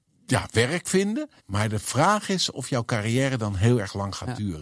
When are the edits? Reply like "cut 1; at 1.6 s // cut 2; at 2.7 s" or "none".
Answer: cut 1; at 1.4 s